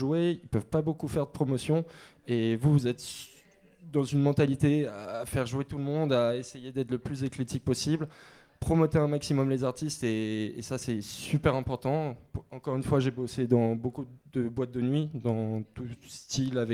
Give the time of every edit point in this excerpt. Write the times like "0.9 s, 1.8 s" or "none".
none